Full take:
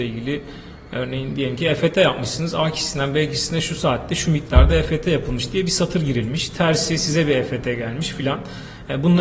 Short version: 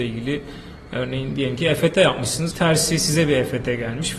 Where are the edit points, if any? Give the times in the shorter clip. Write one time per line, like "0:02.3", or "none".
0:02.5